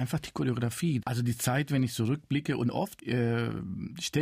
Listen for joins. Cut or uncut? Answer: cut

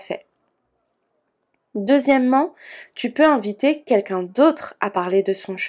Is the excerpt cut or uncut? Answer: uncut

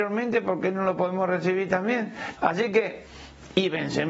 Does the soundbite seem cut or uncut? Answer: cut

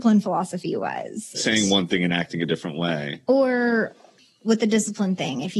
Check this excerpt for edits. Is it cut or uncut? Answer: cut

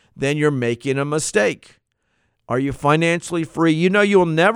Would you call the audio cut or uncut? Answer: uncut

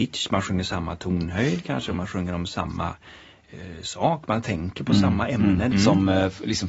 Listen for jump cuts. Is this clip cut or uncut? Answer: cut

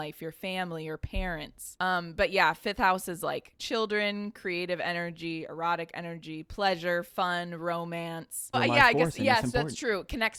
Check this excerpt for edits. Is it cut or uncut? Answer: cut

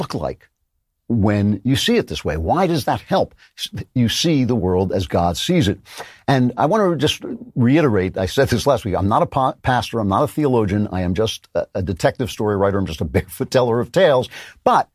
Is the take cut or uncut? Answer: uncut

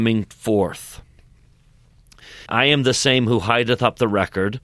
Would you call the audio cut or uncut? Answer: cut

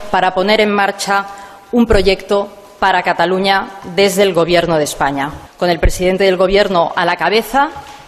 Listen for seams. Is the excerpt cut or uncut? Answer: cut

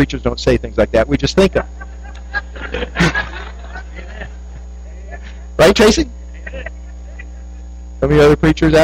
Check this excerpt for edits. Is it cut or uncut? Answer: uncut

